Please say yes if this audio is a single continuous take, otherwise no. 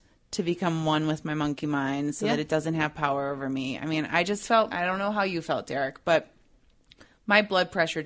no